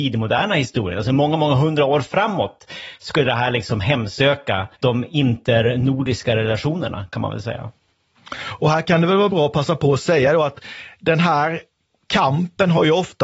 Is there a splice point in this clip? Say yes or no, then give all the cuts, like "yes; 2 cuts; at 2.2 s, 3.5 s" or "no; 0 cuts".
yes; 1 cut; at 4.7 s